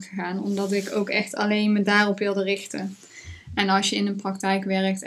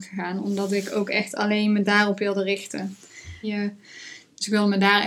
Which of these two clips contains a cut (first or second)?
second